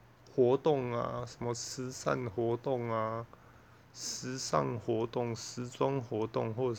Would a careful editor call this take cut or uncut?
uncut